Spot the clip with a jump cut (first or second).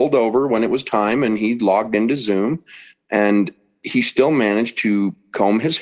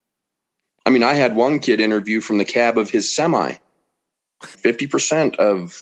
second